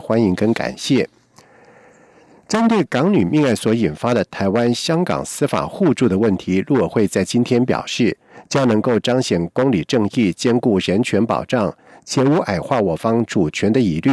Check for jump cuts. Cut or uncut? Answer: uncut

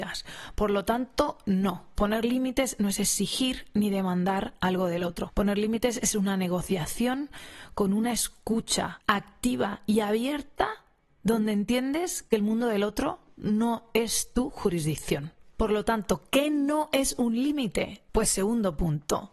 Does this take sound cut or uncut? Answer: uncut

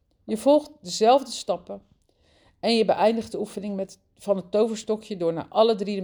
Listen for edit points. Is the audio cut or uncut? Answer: uncut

